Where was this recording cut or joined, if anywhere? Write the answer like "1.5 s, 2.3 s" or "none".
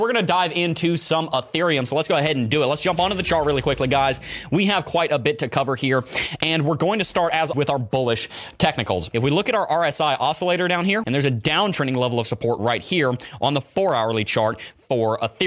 7.5 s, 9.1 s, 11.0 s